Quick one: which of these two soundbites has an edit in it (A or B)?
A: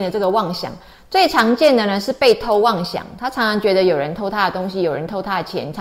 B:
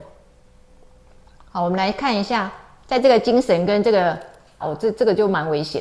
B